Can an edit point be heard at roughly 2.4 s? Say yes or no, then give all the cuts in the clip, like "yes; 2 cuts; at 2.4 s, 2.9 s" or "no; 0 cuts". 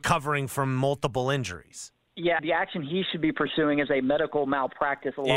yes; 1 cut; at 2.4 s